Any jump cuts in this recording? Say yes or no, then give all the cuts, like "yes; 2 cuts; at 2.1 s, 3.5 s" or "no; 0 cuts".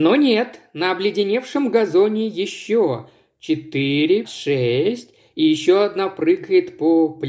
yes; 1 cut; at 4.2 s